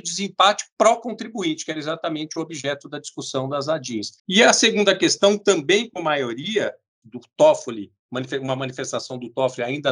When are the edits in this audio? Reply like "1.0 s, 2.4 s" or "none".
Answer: 4.2 s, 7.0 s